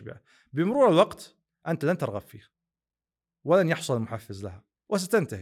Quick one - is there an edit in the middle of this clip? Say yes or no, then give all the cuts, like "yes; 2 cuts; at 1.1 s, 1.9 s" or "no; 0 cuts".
no; 0 cuts